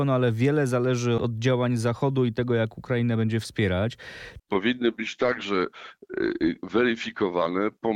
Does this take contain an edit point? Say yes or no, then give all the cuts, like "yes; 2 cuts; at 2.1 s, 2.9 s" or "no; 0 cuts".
yes; 2 cuts; at 1.2 s, 4.4 s